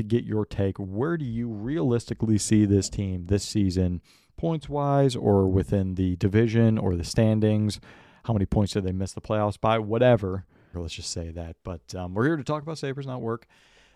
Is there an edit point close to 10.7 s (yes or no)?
yes